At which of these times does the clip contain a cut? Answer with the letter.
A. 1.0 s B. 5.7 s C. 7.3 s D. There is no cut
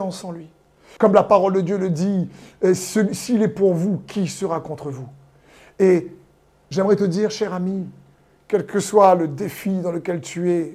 A